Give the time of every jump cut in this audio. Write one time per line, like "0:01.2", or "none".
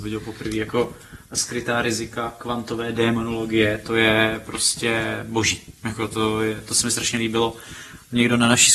none